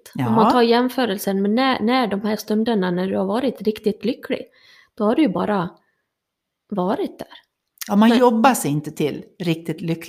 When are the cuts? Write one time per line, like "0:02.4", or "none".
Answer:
none